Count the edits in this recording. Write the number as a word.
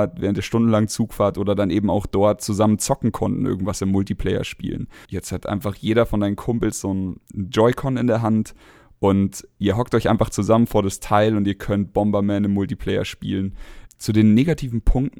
two